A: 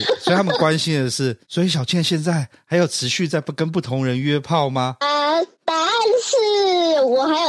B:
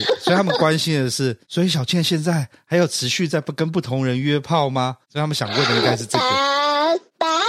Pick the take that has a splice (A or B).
A